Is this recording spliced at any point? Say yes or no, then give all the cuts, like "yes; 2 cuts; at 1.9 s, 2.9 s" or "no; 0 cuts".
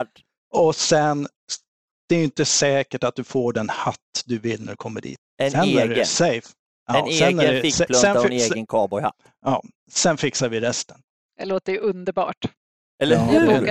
yes; 1 cut; at 5.2 s